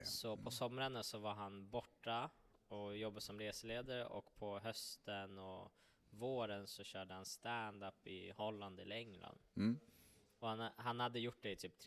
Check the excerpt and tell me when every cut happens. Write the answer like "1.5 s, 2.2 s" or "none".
none